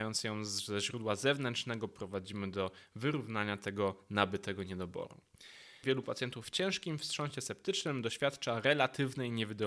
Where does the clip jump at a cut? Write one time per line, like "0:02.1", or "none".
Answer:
0:05.8